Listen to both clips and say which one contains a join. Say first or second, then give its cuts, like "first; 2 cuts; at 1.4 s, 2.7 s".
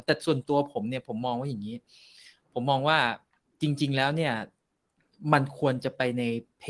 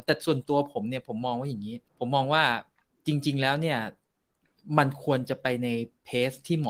second; 1 cut; at 1.9 s